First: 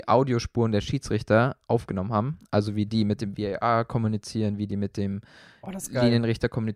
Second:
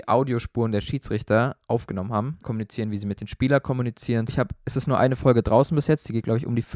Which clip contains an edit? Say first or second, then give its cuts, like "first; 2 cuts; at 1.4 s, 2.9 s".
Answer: second; 2 cuts; at 2.4 s, 4.3 s